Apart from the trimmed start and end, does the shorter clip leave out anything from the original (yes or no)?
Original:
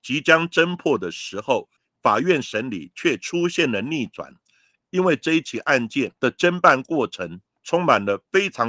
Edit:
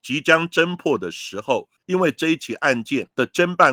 yes